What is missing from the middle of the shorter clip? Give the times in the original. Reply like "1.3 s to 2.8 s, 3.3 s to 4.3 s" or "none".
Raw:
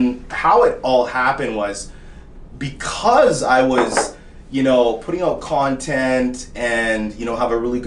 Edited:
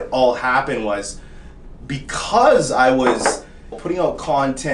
4.4 s to 5.0 s